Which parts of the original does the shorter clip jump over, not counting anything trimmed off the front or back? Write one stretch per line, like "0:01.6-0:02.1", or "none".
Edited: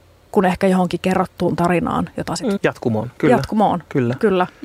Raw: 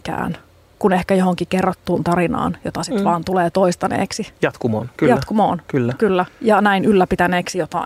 0:03.0-0:04.3